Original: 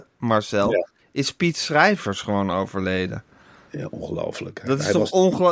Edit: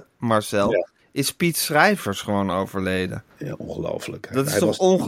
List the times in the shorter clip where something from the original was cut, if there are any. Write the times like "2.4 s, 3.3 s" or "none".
3.3 s